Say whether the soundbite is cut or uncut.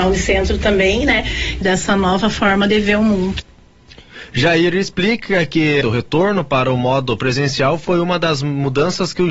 cut